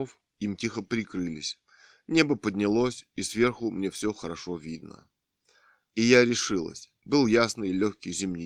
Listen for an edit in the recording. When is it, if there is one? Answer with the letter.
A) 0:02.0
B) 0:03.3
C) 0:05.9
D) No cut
D